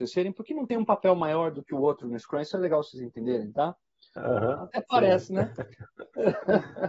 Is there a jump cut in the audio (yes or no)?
yes